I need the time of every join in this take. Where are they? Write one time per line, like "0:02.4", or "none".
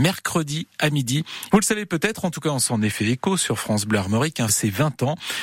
0:01.5
0:04.5